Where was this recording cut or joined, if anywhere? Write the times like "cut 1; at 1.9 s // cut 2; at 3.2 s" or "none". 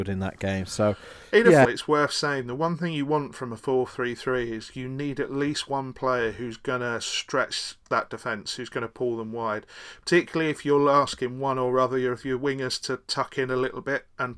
cut 1; at 1.7 s